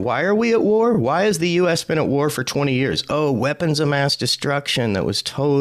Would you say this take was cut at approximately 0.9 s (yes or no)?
no